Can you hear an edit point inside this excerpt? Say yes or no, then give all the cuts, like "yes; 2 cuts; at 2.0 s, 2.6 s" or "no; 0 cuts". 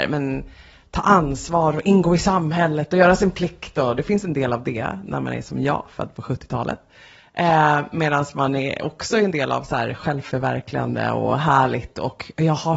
no; 0 cuts